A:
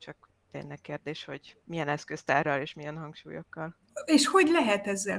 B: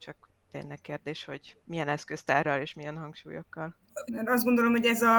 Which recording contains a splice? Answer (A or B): B